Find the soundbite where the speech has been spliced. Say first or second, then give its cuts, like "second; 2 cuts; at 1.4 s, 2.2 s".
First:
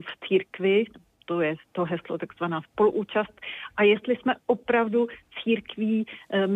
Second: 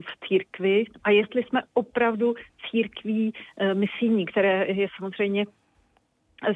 second; 1 cut; at 1.0 s